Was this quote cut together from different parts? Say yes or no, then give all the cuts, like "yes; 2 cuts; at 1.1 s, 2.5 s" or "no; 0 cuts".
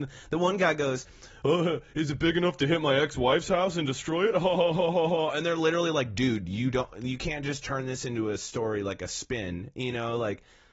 no; 0 cuts